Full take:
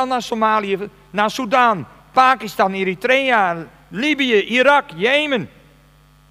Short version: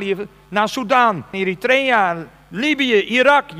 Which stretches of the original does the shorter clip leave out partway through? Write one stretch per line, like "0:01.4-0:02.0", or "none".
0:02.0-0:02.7